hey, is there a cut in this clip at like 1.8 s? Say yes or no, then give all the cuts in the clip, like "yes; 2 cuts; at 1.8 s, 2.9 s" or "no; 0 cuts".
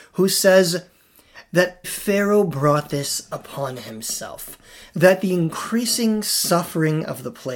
yes; 1 cut; at 1.8 s